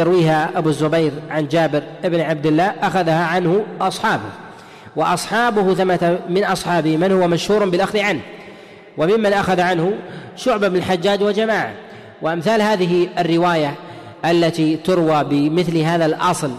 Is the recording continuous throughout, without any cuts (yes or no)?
yes